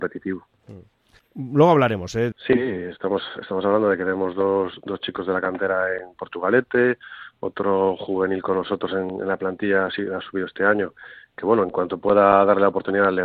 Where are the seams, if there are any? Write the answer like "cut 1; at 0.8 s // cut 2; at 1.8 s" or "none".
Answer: cut 1; at 2.3 s